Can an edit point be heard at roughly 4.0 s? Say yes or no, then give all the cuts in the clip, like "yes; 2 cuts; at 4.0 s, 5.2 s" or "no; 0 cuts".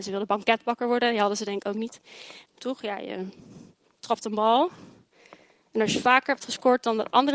no; 1 cut; at 2.5 s